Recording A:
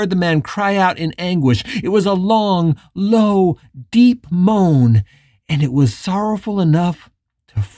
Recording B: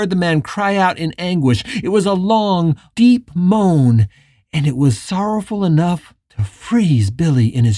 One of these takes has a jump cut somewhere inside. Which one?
B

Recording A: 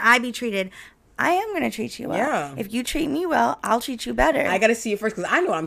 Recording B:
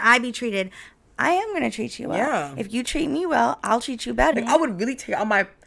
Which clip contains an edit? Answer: B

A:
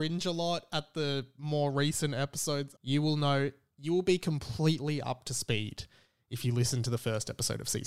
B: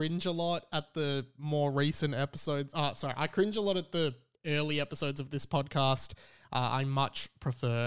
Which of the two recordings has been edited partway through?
A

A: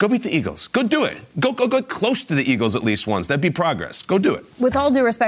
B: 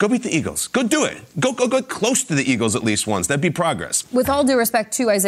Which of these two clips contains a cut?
B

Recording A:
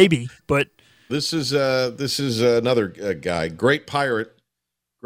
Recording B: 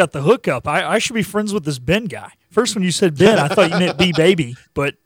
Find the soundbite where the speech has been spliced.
A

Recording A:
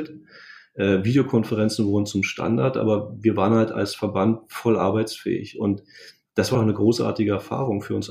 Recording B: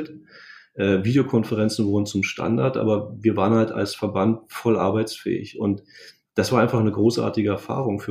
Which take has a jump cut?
A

